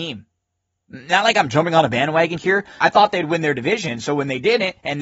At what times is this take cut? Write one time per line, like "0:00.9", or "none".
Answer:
0:02.8